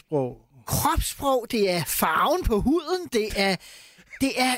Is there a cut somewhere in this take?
no; 0 cuts

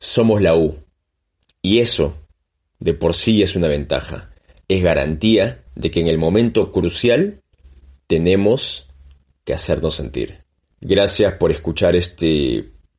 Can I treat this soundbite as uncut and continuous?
no; 2 cuts; at 5.7 s, 10.7 s

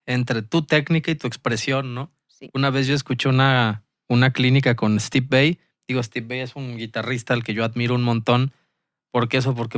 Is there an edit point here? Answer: no; 0 cuts

